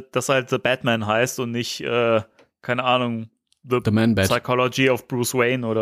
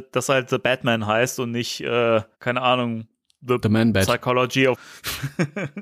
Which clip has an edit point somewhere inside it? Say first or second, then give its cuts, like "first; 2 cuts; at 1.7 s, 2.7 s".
second; 2 cuts; at 2.3 s, 4.7 s